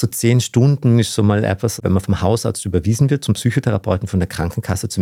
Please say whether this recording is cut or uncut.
cut